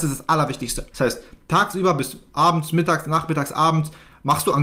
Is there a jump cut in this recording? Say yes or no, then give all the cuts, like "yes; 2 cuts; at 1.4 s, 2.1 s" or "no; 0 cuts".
yes; 1 cut; at 0.9 s